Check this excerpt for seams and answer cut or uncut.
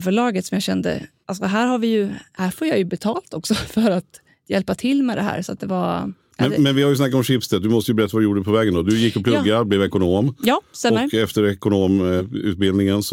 uncut